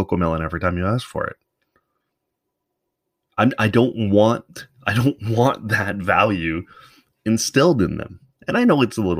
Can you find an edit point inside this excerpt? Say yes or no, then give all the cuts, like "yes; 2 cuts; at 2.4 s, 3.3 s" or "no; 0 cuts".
no; 0 cuts